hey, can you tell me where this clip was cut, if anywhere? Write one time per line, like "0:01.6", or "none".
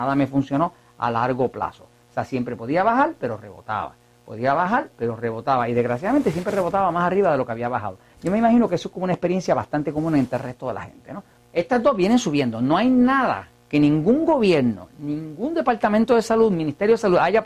0:11.4